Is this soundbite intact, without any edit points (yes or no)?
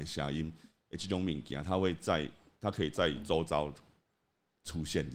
yes